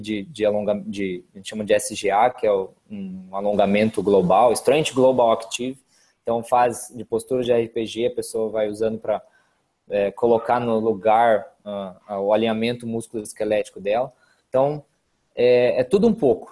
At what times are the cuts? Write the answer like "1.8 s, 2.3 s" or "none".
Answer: none